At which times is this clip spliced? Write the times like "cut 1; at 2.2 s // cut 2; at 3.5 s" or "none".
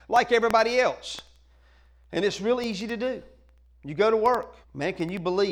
cut 1; at 4.6 s